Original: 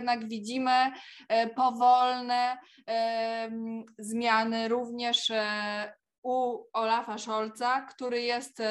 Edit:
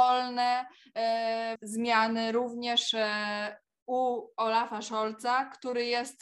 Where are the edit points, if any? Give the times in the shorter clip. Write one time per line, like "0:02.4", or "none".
0:01.6